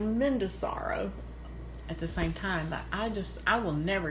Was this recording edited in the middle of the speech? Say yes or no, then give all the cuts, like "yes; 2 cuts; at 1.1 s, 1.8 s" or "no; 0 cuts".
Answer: no; 0 cuts